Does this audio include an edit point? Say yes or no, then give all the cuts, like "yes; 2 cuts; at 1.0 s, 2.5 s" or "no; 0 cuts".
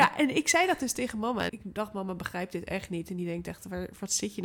yes; 1 cut; at 1.5 s